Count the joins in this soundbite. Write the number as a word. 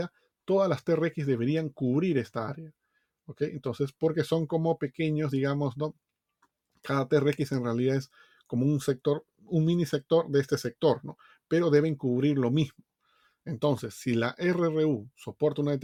zero